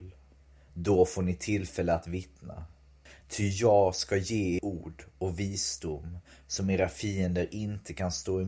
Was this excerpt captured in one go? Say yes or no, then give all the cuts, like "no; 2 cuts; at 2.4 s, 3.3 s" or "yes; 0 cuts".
no; 2 cuts; at 3.2 s, 4.6 s